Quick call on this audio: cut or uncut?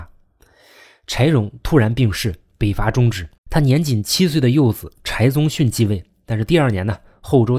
cut